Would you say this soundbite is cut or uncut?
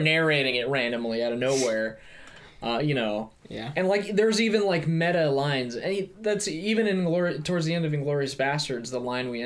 uncut